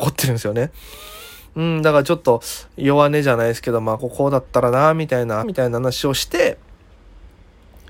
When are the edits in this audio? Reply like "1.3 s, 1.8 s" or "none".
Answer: 4.0 s, 5.4 s